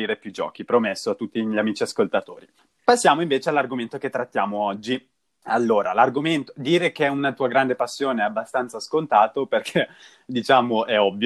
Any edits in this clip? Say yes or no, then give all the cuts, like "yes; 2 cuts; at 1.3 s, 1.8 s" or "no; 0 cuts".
no; 0 cuts